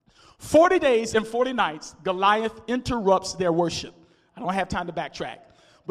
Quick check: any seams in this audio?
no; 0 cuts

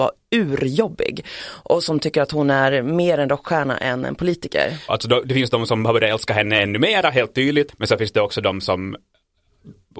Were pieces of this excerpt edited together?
yes; 1 cut; at 4.9 s

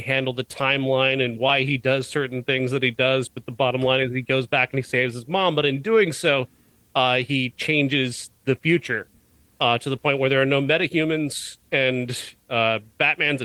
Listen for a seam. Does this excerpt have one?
no; 0 cuts

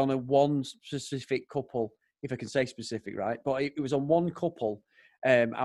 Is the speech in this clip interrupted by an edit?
no; 0 cuts

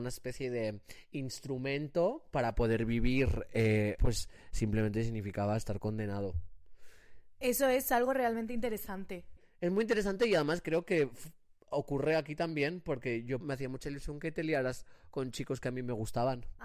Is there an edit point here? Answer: yes; 2 cuts; at 4.0 s, 13.4 s

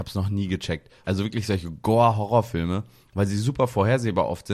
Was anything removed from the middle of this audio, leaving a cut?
yes; 1 cut; at 1.0 s

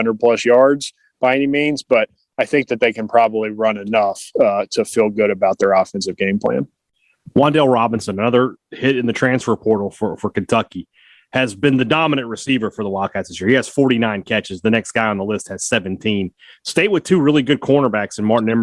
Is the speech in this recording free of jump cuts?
yes; 0 cuts

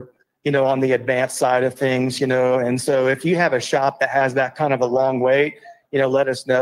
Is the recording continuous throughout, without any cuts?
yes; 0 cuts

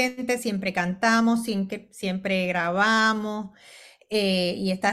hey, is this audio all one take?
yes; 0 cuts

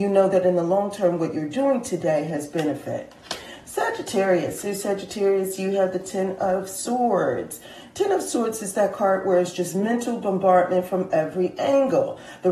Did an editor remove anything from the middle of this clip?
no; 0 cuts

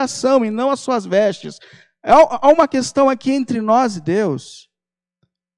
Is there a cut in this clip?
no; 0 cuts

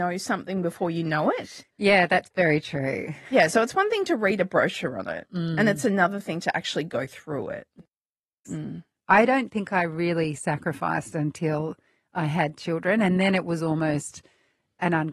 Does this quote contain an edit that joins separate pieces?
yes; 1 cut; at 8.4 s

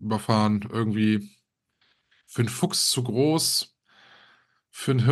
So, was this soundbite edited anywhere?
no; 0 cuts

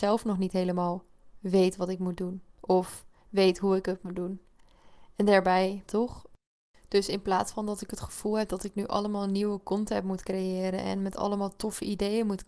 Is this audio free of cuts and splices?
no; 1 cut; at 5.9 s

